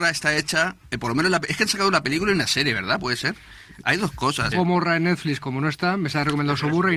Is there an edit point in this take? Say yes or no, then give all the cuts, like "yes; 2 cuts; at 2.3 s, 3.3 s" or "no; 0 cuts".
yes; 1 cut; at 4.5 s